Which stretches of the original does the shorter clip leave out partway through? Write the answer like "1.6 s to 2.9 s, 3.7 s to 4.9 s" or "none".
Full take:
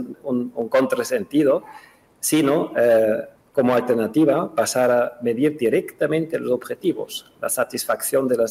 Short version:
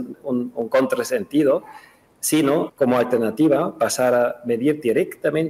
2.7 s to 3.5 s